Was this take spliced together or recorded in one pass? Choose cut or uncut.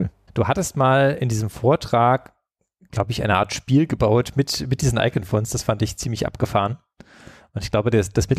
uncut